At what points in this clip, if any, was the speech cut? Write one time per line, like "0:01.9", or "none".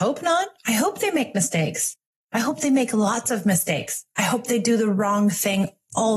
none